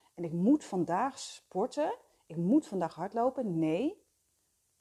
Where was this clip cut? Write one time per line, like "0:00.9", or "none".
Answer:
none

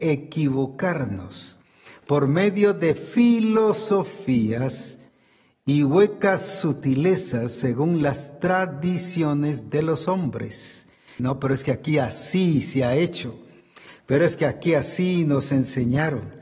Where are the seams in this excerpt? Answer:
0:11.2

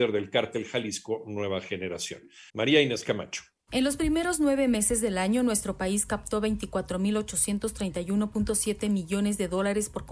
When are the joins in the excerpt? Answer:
0:02.5

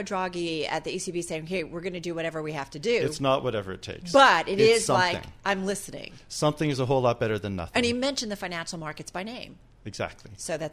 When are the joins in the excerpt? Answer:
none

